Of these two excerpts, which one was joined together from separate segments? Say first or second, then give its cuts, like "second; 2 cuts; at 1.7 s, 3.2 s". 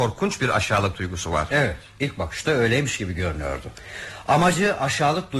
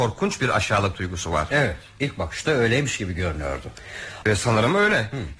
second; 1 cut; at 4.2 s